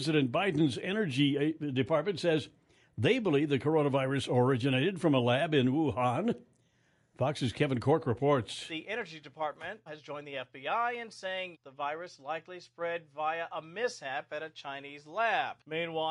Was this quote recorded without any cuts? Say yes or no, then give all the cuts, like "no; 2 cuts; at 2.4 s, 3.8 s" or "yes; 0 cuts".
no; 2 cuts; at 9.9 s, 11.5 s